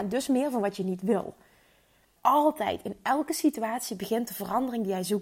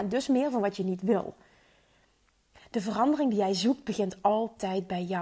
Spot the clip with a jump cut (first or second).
first